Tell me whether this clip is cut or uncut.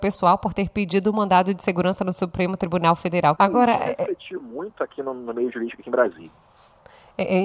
cut